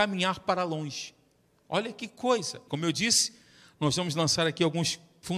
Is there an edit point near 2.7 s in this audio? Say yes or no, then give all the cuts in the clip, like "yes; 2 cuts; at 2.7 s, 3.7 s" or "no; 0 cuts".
yes; 1 cut; at 2.7 s